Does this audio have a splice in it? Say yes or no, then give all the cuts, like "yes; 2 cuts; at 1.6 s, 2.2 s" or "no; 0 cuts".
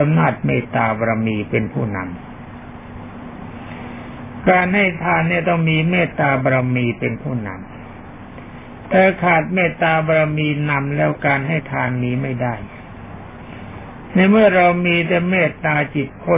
no; 0 cuts